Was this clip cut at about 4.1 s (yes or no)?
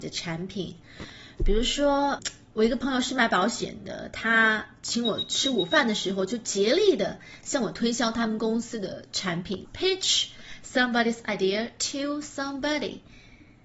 no